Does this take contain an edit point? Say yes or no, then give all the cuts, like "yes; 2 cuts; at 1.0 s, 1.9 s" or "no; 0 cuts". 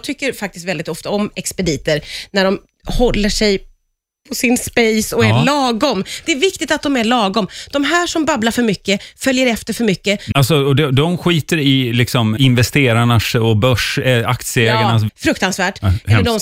yes; 3 cuts; at 10.3 s, 12.4 s, 15.1 s